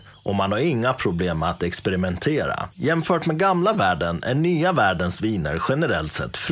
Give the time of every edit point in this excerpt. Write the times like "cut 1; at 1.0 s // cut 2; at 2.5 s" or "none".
cut 1; at 2.7 s